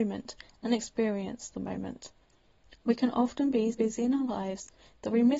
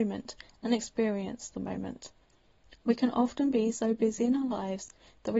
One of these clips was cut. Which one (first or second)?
first